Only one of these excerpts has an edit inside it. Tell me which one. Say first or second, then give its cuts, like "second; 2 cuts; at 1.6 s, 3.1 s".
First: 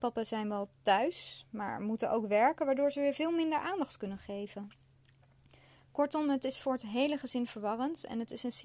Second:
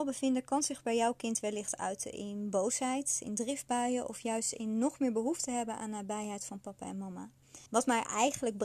second; 1 cut; at 7.7 s